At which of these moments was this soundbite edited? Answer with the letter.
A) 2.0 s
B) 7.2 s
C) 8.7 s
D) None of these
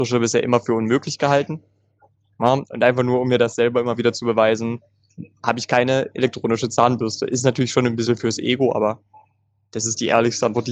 D